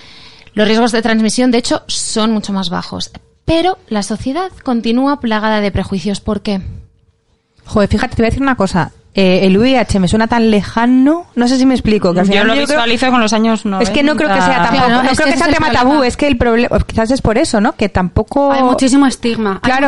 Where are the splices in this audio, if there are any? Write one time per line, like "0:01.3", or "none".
none

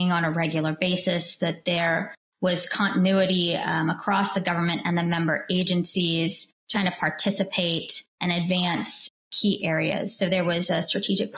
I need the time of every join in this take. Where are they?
0:06.7

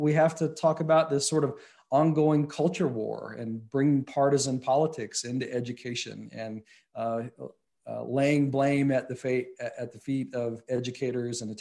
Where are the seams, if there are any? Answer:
none

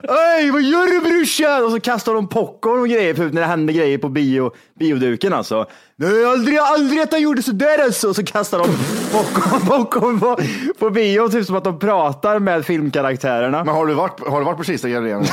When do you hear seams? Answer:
none

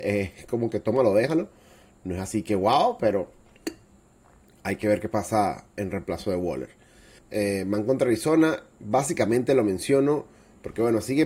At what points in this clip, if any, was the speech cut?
0:07.2

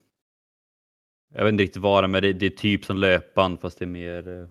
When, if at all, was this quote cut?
none

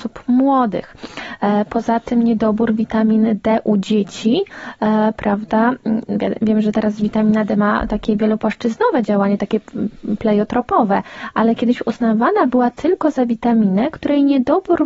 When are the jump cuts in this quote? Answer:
none

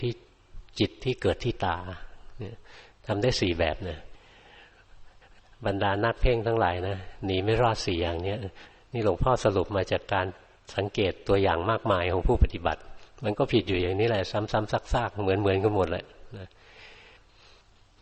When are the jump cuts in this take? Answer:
none

